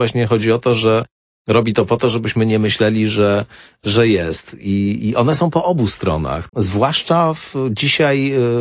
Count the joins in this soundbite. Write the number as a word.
one